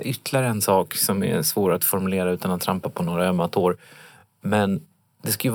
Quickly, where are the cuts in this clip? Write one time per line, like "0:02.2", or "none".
none